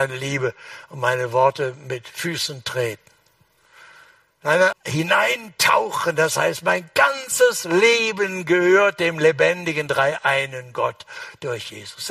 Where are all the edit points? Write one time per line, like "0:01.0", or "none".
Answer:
0:04.7